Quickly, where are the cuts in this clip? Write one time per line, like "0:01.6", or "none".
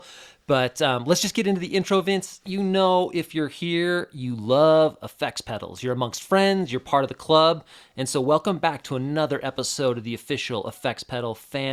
none